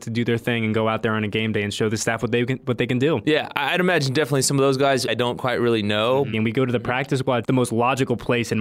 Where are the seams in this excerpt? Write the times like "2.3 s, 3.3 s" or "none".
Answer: 5.1 s, 6.3 s, 7.4 s